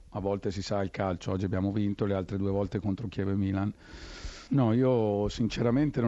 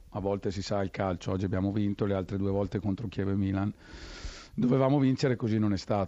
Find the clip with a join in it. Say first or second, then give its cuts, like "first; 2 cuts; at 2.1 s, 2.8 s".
first; 1 cut; at 4.5 s